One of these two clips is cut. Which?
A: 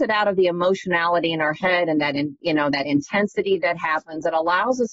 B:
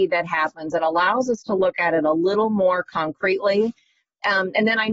A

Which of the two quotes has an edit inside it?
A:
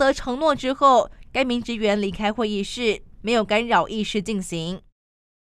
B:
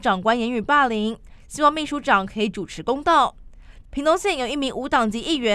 B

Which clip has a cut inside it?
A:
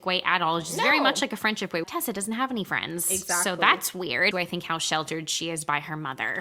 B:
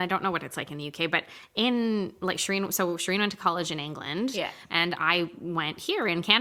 A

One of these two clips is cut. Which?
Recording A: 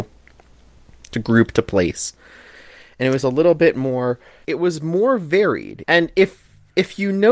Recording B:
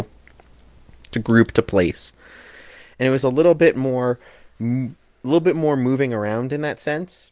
A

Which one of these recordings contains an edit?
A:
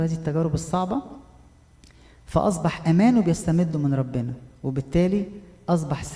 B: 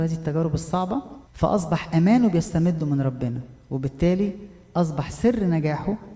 B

